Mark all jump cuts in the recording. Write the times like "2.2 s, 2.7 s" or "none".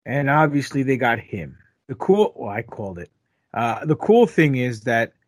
1.8 s

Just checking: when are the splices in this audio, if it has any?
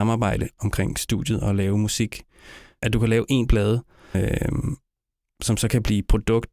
2.8 s, 4.1 s

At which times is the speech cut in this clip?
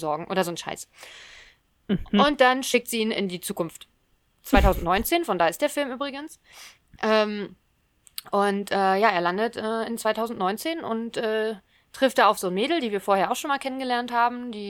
none

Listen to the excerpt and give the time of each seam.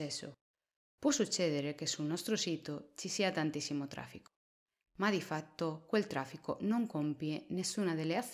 none

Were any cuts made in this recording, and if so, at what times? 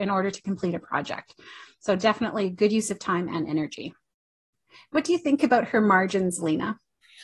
none

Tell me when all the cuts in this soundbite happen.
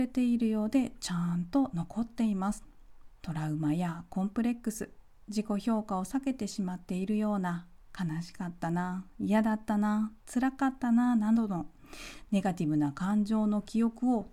3.2 s

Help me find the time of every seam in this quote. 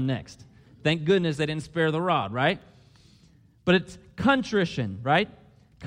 none

